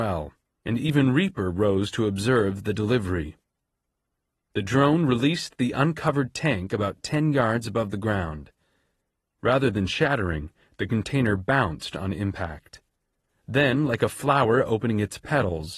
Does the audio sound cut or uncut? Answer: uncut